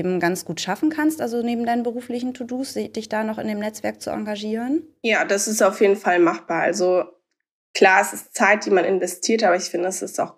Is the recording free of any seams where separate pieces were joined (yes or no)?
yes